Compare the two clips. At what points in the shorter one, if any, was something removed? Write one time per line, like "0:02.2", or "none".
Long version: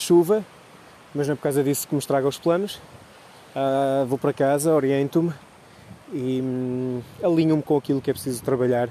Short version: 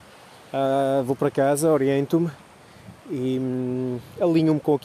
none